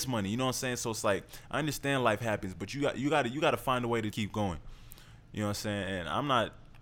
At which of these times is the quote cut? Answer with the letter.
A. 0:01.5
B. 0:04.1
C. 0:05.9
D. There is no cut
B